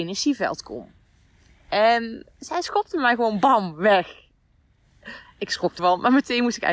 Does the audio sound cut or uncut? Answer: cut